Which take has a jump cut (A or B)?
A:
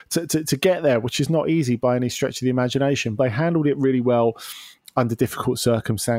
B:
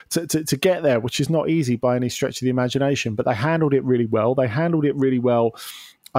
A